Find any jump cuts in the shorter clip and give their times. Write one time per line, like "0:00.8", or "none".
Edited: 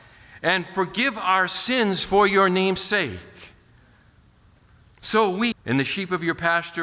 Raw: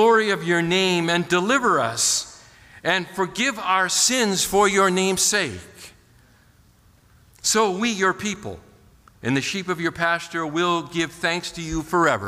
0:05.5